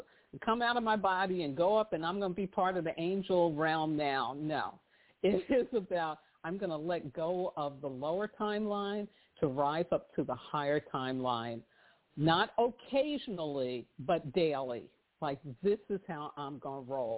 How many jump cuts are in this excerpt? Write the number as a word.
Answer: zero